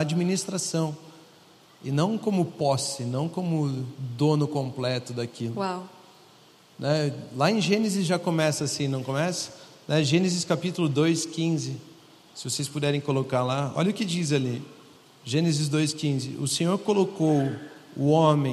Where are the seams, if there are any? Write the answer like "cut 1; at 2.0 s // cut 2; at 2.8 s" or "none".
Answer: none